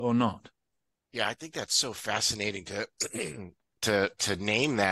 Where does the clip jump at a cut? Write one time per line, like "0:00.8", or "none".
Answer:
0:01.0